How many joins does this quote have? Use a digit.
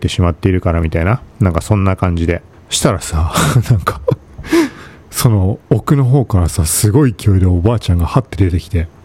1